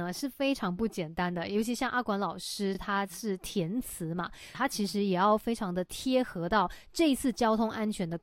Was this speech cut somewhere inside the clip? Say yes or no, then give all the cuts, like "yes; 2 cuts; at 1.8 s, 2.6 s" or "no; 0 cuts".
no; 0 cuts